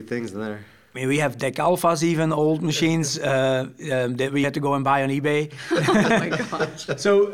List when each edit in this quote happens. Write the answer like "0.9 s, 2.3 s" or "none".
4.4 s

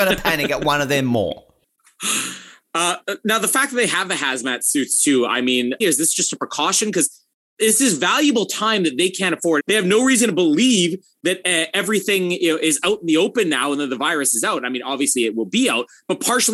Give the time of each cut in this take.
5.8 s, 9.6 s

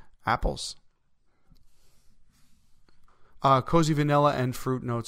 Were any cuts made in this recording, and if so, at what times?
3.4 s

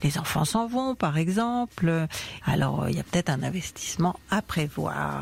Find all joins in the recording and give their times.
2.4 s

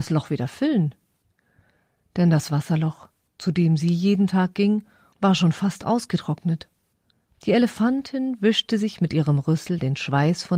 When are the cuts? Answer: 5.1 s, 7.2 s

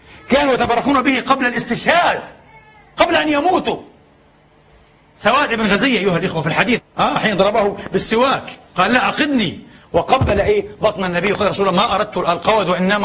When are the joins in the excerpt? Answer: 6.8 s

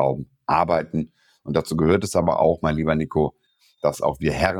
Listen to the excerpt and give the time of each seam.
none

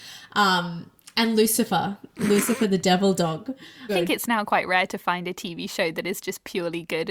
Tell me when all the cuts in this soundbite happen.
3.9 s

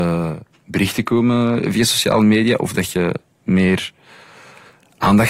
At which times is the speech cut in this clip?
none

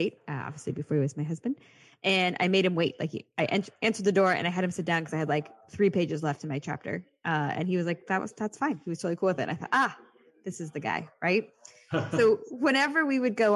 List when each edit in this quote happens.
none

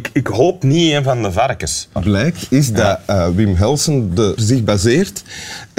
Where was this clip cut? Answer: 2.0 s, 4.4 s

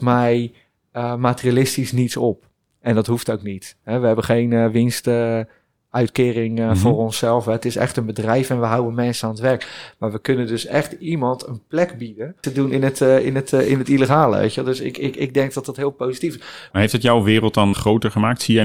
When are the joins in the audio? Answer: 12.4 s, 16.7 s, 17.7 s

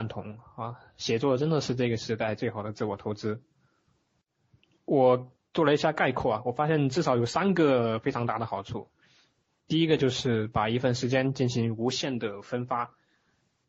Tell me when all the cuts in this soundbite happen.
none

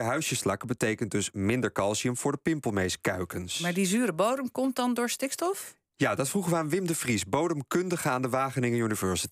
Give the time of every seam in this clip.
none

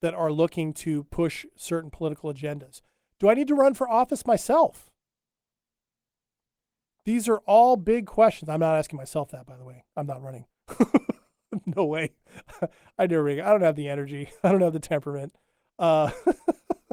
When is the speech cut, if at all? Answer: none

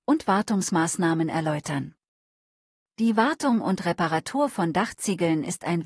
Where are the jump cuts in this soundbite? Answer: none

